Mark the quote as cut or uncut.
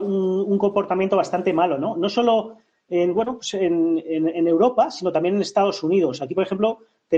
uncut